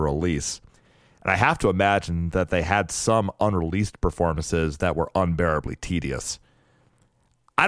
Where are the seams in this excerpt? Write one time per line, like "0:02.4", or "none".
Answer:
none